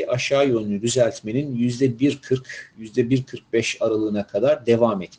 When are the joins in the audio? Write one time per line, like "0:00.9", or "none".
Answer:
none